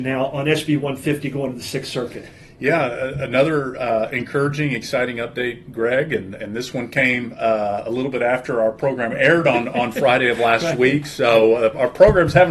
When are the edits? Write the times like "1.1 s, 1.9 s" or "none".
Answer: none